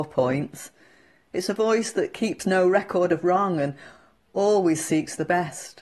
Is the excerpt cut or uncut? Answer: uncut